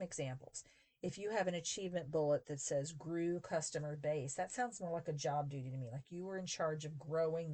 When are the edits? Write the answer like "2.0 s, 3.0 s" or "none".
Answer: none